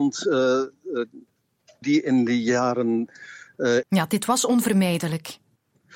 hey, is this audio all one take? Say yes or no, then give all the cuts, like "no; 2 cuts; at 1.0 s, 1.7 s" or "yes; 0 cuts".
no; 2 cuts; at 1.8 s, 3.8 s